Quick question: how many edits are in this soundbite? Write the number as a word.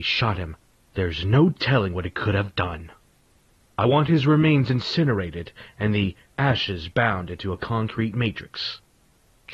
zero